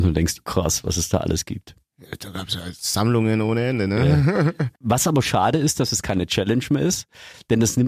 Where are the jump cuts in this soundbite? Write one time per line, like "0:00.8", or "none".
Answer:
0:05.2